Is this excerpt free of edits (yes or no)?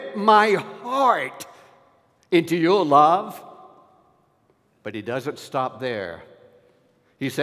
yes